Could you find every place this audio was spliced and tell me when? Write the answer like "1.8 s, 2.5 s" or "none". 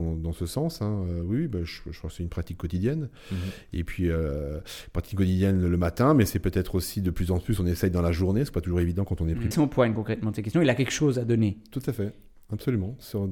9.5 s